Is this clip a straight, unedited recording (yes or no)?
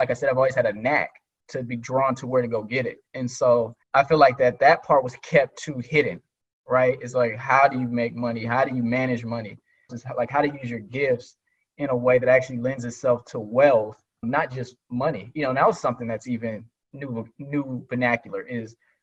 no